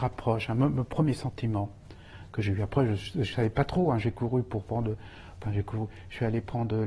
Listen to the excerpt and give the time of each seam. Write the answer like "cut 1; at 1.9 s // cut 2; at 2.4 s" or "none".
none

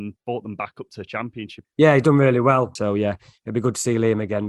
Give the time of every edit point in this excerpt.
cut 1; at 1.6 s // cut 2; at 2.8 s

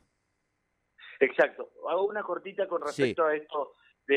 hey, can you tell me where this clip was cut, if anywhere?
none

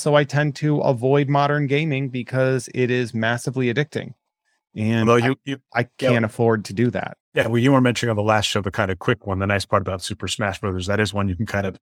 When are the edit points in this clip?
none

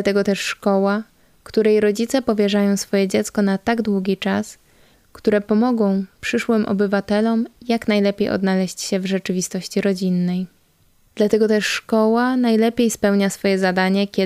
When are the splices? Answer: cut 1; at 4.9 s // cut 2; at 11.1 s

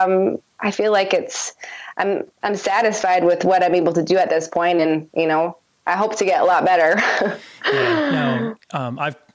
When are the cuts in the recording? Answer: none

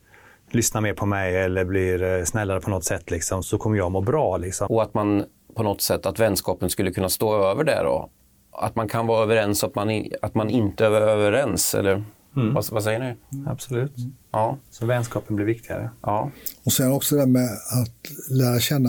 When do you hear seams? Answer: cut 1; at 3.4 s // cut 2; at 4.7 s

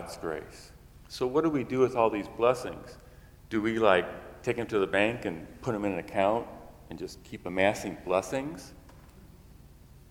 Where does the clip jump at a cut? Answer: none

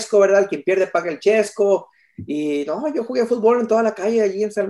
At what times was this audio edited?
none

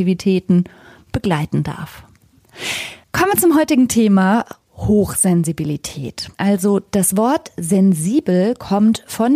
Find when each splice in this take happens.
cut 1; at 3.0 s // cut 2; at 6.3 s

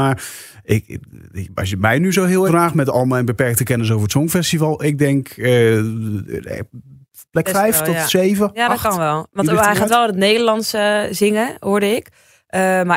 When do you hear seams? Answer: cut 1; at 2.5 s

